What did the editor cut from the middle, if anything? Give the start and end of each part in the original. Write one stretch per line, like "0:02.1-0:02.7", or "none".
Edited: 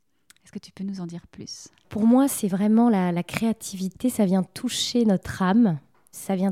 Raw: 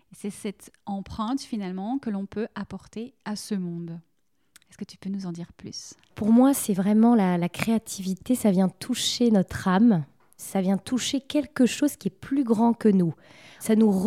none